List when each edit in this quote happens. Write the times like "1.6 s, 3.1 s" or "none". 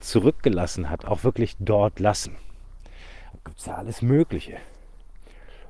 3.3 s